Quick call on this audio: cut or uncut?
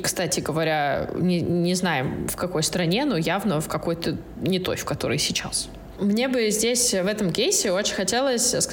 uncut